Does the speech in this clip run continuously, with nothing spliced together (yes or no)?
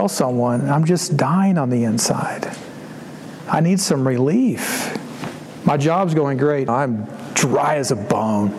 no